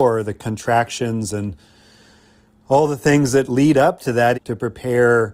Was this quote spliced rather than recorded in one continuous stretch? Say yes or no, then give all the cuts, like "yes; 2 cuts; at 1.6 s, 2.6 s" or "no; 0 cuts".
yes; 1 cut; at 4.3 s